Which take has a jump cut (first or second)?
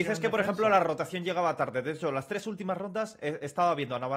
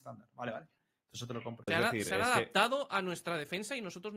second